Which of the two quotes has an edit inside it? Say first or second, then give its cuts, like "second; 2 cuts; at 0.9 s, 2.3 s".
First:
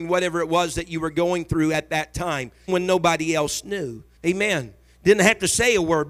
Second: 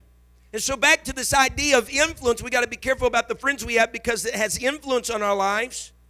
first; 2 cuts; at 2.7 s, 4.2 s